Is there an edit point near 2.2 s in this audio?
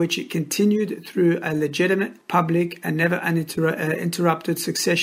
yes; 1 cut; at 2.2 s

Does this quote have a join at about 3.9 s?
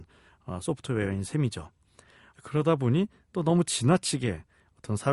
no; 1 cut; at 2.3 s

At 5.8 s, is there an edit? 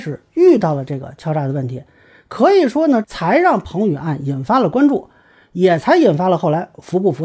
no; 1 cut; at 3.0 s

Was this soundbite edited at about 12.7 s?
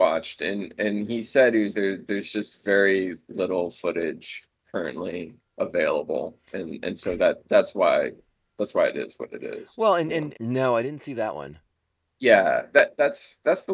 yes; 3 cuts; at 1.7 s, 10.3 s, 12.7 s

